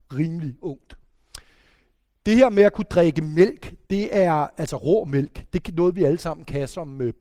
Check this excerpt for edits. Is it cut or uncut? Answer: uncut